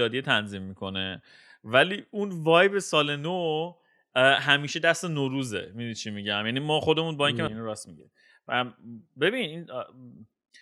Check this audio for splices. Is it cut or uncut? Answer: cut